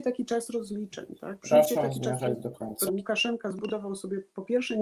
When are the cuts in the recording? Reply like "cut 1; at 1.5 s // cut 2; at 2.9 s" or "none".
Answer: cut 1; at 2.9 s

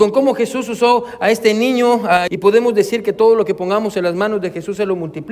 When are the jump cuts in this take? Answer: cut 1; at 2.3 s

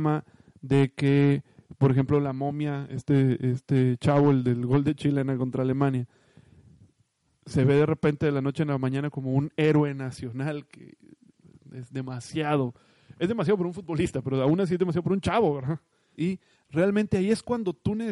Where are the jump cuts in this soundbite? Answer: cut 1; at 16.2 s

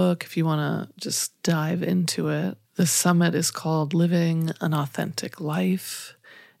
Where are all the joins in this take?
cut 1; at 2.6 s

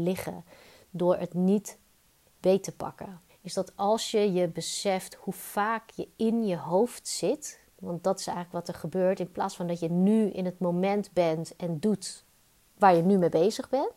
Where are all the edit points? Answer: cut 1; at 3.3 s

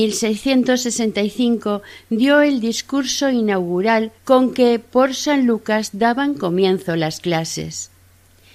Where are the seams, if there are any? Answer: cut 1; at 4.2 s

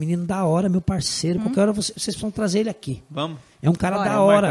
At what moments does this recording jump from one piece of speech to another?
cut 1; at 1.4 s

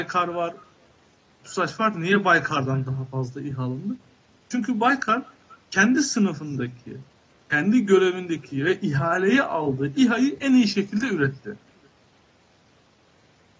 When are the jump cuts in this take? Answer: cut 1; at 1.4 s // cut 2; at 5.6 s

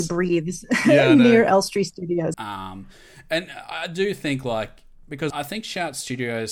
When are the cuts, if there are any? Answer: cut 1; at 2.3 s // cut 2; at 5.3 s

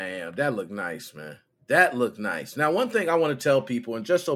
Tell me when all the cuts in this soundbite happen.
none

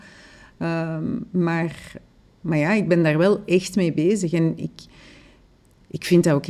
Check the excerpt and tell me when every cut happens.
none

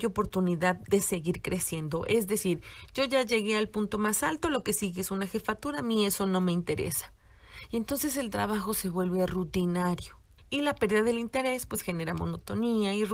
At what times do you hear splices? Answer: cut 1; at 10.4 s

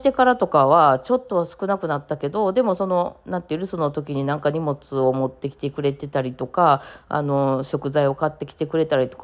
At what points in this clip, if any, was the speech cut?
none

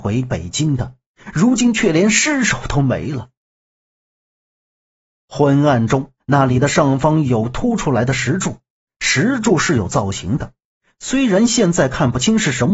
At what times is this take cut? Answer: cut 1; at 6.2 s

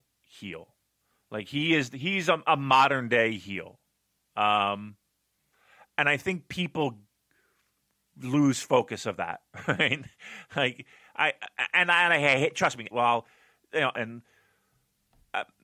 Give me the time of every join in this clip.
cut 1; at 12.9 s // cut 2; at 13.9 s

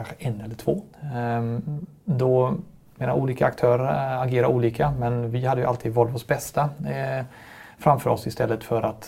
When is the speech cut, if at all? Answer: cut 1; at 0.9 s

